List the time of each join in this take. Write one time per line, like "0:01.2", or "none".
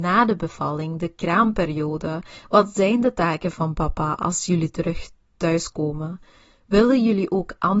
none